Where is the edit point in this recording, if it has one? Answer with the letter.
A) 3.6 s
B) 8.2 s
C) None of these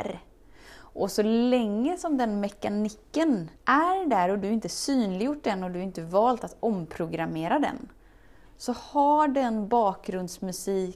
A